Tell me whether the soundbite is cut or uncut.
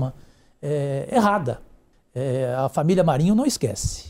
cut